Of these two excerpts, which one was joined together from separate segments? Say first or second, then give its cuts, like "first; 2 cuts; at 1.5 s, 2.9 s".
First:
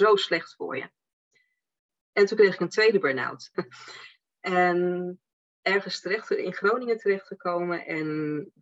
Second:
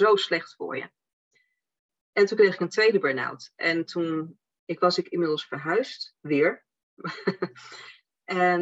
first; 1 cut; at 3.5 s